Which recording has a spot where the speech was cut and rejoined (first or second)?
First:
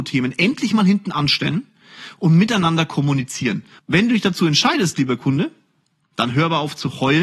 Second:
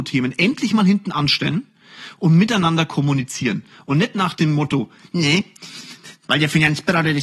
first